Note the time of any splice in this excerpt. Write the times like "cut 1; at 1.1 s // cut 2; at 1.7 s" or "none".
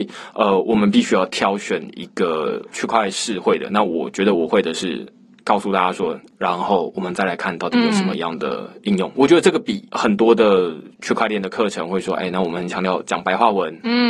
cut 1; at 6.3 s